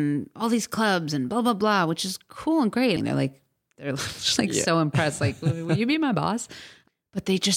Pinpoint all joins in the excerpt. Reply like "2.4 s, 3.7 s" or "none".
3.0 s